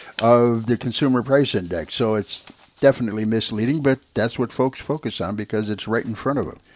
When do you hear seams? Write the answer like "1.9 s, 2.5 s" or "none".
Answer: none